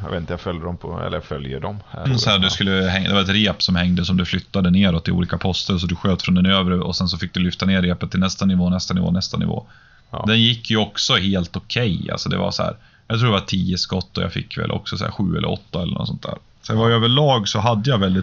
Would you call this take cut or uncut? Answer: cut